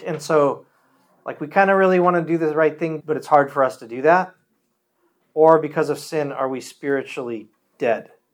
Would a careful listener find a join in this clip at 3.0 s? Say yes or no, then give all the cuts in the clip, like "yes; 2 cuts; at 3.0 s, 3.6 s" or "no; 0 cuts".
yes; 1 cut; at 3.0 s